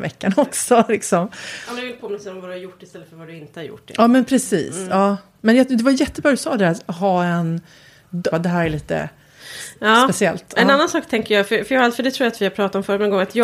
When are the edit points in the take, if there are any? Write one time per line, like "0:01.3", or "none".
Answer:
0:08.3

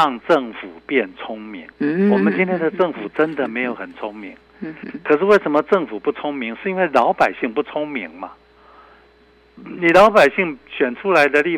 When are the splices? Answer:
0:01.7

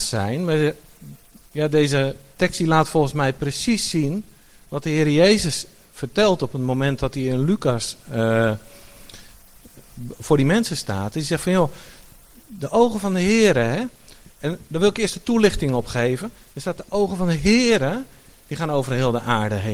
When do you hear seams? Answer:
none

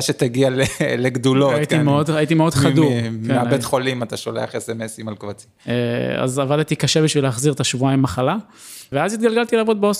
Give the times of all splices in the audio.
0:08.9

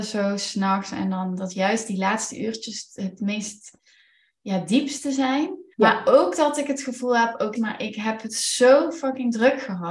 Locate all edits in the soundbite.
0:05.7
0:07.5

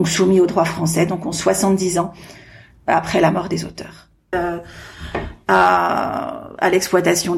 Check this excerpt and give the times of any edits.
0:04.3

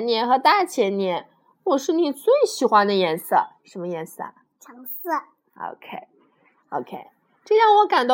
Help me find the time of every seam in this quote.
0:04.5
0:06.6

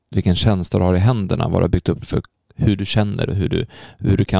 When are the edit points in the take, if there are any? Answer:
0:02.0
0:03.3

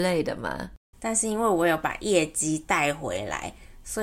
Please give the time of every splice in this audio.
0:00.9

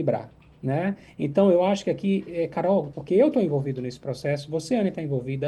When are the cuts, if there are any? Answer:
0:02.9

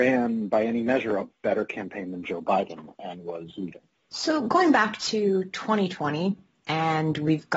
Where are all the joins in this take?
0:03.9

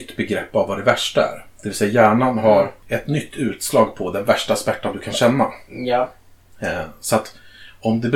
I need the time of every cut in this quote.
none

